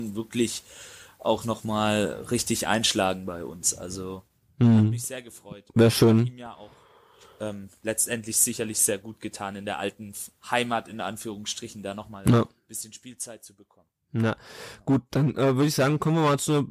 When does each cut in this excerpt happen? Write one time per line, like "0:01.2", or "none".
none